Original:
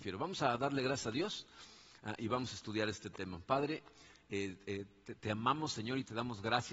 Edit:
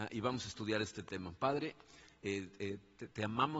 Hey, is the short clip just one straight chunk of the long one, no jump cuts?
yes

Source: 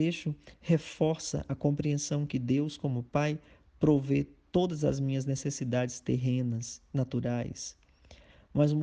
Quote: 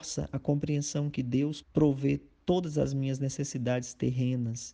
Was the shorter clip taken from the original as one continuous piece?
no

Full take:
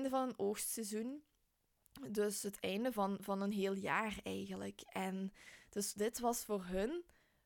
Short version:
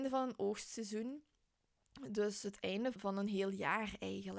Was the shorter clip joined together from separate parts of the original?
yes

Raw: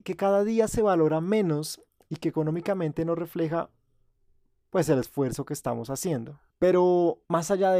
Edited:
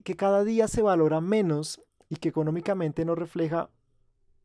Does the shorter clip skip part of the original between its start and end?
no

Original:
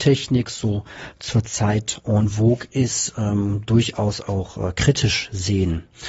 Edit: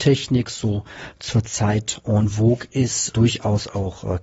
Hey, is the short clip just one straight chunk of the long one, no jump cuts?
no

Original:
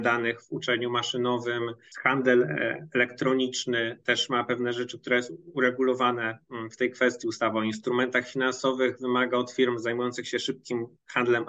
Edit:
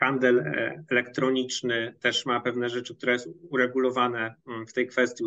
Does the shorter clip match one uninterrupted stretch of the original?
yes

